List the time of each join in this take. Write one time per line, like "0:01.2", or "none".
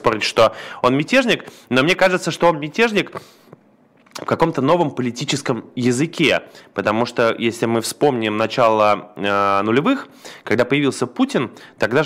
none